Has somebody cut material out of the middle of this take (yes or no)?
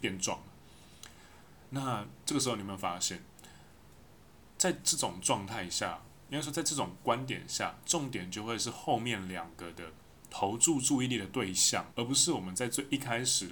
yes